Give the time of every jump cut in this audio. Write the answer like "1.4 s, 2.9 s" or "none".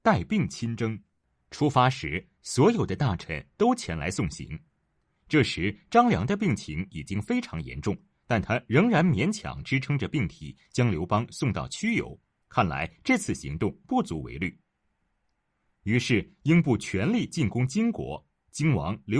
12.4 s